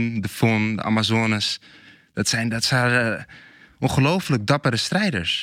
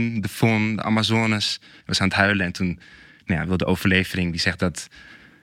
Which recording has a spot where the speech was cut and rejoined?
second; 1 cut; at 1.8 s

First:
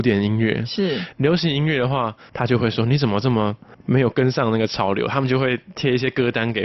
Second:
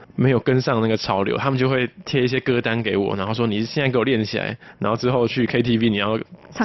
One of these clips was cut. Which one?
first; 1 cut; at 2.3 s

